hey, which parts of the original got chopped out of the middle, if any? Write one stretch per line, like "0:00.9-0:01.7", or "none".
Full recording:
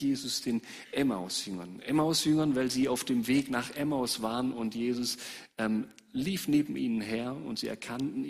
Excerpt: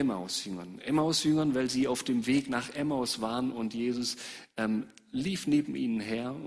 none